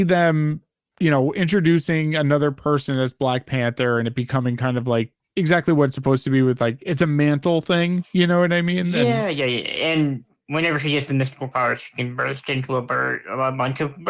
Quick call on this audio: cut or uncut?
uncut